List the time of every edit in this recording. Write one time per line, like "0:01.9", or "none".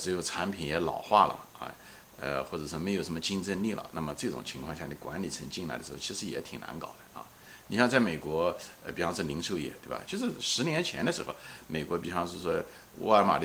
0:03.9
0:10.1

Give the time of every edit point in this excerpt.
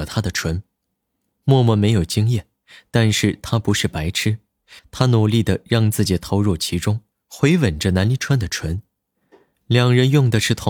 0:04.8

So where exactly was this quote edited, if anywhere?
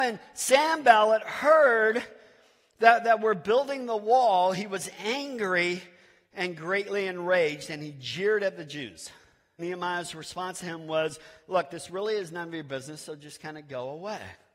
0:09.6

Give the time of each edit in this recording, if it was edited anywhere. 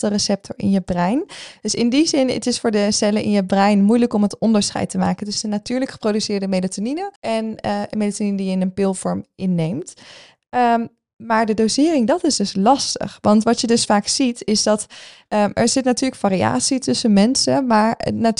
0:07.2

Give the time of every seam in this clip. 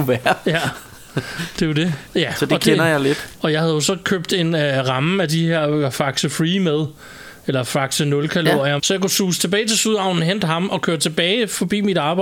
0:02.1
0:03.4
0:08.8

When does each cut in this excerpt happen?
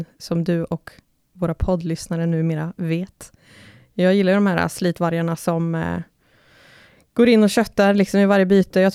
none

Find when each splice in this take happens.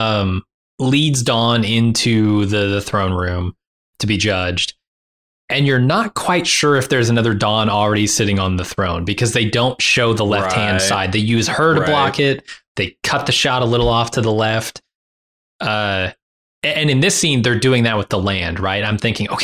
none

